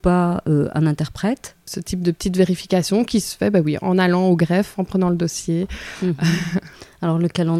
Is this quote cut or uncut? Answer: cut